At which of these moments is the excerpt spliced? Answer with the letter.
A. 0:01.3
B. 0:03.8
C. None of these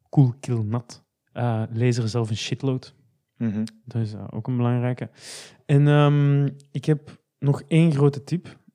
A